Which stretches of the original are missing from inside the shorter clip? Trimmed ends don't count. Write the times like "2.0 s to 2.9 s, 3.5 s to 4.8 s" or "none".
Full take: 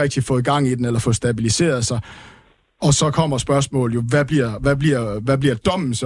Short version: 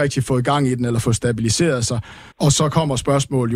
2.3 s to 2.7 s